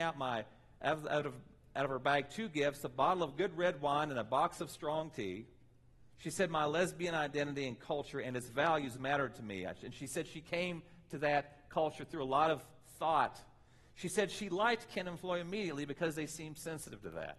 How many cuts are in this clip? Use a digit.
1